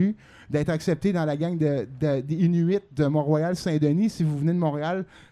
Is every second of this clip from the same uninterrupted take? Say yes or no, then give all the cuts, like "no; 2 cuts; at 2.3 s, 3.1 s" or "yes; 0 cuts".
yes; 0 cuts